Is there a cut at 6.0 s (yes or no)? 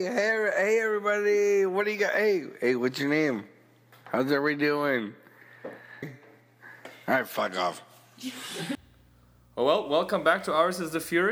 yes